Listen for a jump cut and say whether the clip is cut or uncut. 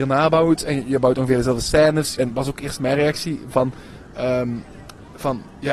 cut